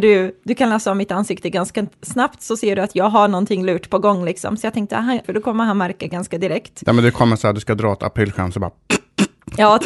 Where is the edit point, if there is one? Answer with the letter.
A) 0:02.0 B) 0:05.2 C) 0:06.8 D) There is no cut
B